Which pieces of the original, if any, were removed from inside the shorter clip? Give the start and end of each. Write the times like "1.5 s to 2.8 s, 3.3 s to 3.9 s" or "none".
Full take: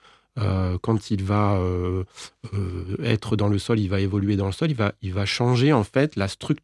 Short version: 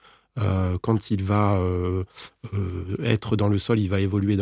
none